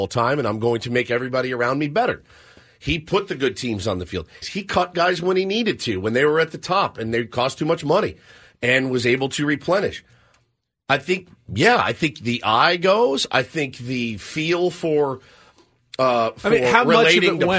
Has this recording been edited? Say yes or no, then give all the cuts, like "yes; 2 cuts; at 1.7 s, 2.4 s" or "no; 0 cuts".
yes; 1 cut; at 4.4 s